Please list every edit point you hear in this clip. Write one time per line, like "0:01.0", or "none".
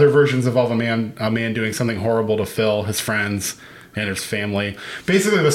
none